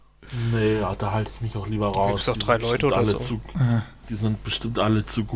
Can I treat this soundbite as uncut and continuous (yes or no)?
yes